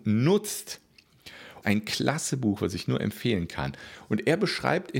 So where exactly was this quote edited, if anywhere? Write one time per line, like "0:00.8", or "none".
0:01.6